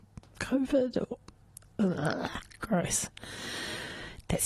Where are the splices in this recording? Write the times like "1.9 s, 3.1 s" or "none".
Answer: none